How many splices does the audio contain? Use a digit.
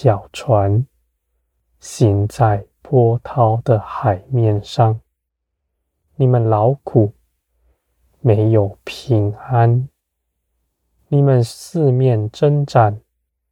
0